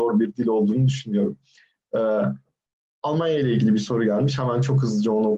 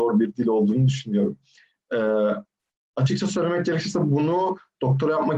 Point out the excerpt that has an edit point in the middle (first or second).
second